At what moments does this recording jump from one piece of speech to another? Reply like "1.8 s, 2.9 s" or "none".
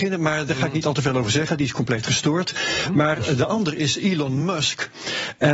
none